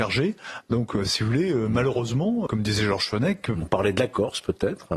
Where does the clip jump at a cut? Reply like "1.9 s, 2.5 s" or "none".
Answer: 2.5 s, 3.6 s